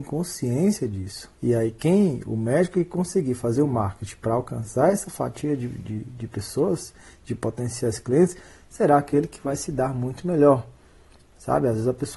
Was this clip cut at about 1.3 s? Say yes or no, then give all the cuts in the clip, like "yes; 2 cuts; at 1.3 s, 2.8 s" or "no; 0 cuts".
yes; 1 cut; at 1.3 s